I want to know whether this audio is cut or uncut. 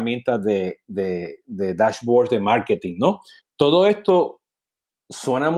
cut